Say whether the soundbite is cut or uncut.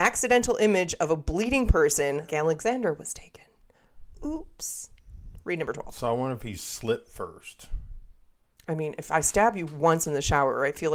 cut